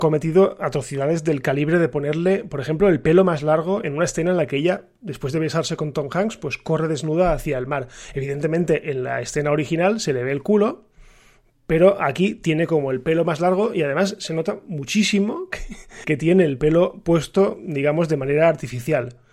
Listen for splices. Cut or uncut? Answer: cut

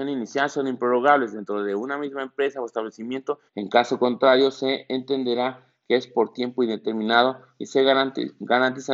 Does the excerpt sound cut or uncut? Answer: cut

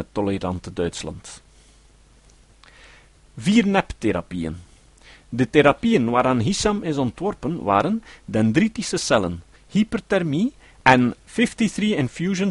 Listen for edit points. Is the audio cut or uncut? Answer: cut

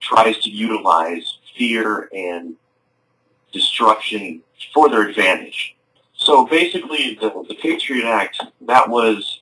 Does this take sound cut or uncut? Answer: cut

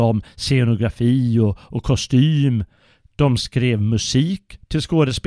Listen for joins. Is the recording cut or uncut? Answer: uncut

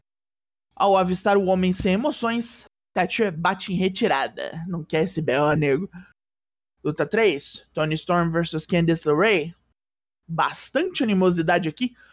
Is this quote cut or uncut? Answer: cut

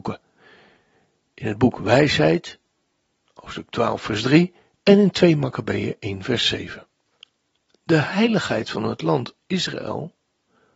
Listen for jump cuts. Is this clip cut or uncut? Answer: uncut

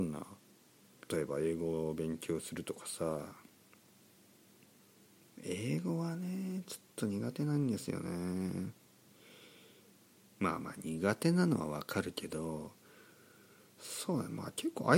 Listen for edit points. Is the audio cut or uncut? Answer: cut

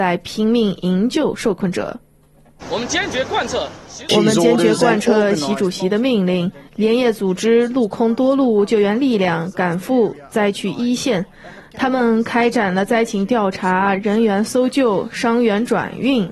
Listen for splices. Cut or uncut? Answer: cut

